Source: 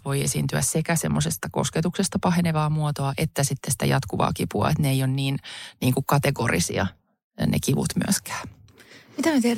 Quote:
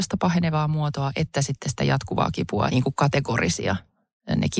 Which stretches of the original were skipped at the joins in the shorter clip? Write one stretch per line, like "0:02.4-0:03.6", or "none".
0:04.7-0:05.8